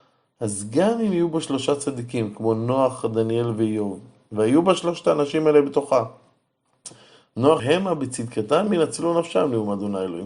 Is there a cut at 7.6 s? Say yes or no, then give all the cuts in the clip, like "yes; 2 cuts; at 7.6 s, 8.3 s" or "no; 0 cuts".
yes; 1 cut; at 7.6 s